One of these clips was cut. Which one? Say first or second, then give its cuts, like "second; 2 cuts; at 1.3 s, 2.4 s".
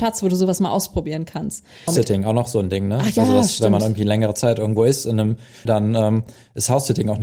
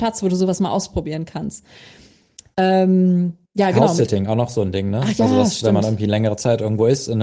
first; 2 cuts; at 1.9 s, 5.7 s